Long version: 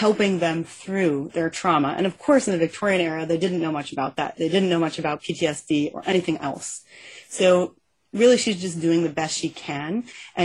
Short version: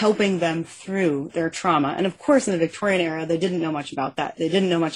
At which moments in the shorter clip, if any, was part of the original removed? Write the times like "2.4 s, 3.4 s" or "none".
none